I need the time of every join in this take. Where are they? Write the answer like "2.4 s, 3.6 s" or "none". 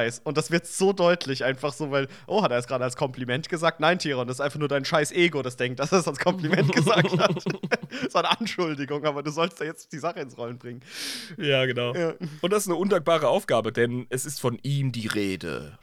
none